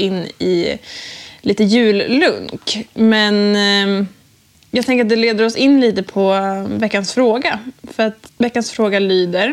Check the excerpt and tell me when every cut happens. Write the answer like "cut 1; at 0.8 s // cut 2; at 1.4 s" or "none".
cut 1; at 8.3 s